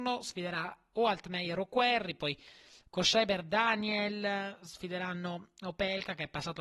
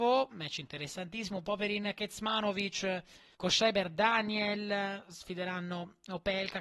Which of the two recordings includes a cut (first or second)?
second